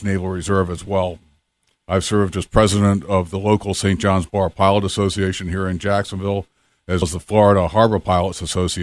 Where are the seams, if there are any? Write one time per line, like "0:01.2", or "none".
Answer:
0:07.0